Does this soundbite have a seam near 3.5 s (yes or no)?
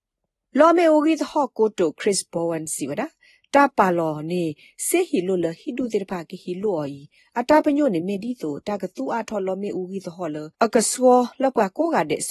no